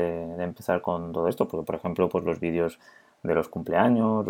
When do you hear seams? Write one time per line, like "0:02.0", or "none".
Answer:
none